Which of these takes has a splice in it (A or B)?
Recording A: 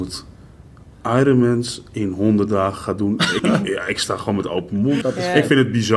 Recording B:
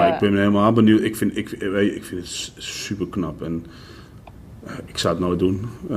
A